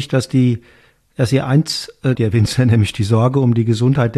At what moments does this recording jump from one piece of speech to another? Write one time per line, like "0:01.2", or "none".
0:02.2